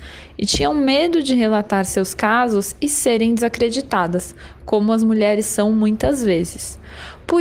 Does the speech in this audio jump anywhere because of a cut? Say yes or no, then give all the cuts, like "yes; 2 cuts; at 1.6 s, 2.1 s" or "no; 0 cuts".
no; 0 cuts